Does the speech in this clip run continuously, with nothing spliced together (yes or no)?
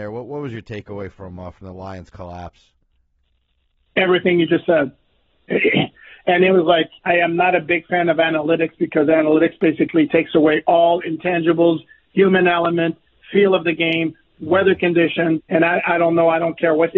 no